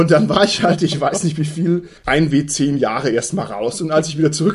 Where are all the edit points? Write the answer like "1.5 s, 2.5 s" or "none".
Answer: 2.0 s